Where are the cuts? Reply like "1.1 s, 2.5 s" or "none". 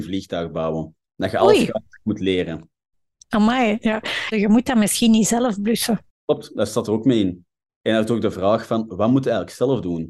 4.3 s